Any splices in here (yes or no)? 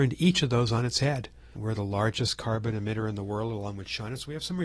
yes